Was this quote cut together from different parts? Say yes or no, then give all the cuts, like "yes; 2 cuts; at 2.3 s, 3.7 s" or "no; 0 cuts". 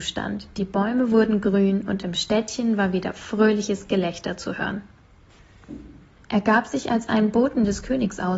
yes; 1 cut; at 6.2 s